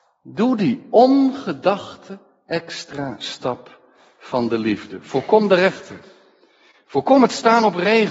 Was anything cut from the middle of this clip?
no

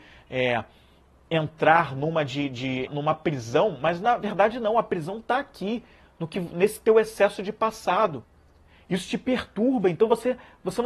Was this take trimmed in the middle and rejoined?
yes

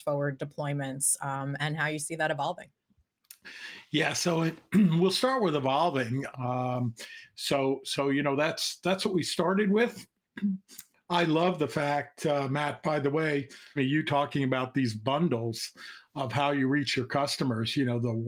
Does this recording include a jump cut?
yes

